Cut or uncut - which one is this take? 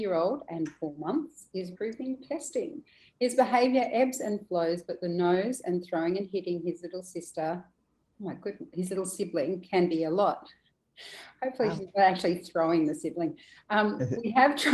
cut